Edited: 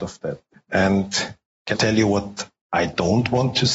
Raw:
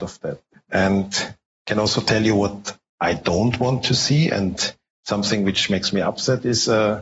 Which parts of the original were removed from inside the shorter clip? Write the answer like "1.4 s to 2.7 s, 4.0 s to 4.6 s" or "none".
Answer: 1.7 s to 2.0 s